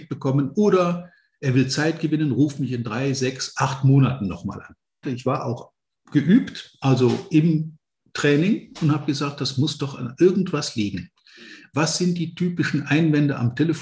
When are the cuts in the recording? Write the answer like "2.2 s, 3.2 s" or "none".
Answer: 5.0 s, 11.7 s